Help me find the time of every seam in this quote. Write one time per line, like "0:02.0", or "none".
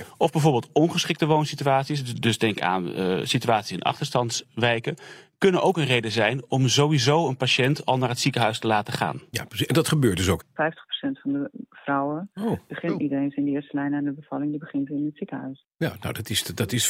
0:10.4